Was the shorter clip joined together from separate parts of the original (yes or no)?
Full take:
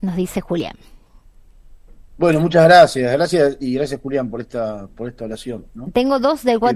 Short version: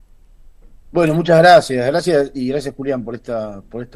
no